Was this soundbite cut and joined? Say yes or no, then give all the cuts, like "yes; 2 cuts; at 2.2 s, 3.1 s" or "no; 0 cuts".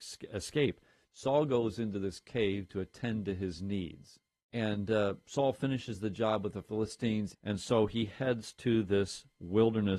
yes; 3 cuts; at 1.0 s, 4.4 s, 7.3 s